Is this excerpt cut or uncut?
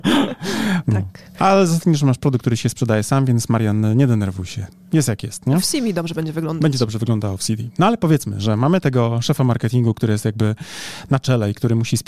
uncut